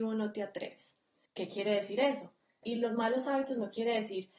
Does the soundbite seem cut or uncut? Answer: cut